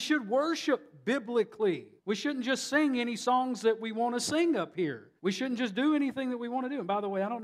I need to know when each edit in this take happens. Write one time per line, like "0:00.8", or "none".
0:02.0
0:05.2